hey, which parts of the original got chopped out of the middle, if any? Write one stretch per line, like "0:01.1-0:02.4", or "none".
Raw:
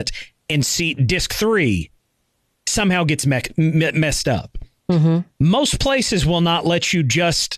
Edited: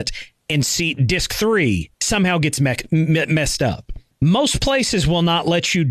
0:01.9-0:02.6
0:04.8-0:05.3